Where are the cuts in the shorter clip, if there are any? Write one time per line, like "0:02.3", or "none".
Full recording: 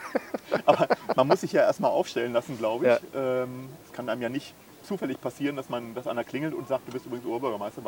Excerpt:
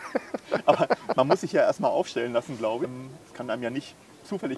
0:02.8

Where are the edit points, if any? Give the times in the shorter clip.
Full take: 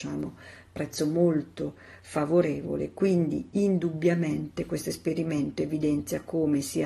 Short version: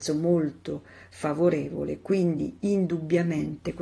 none

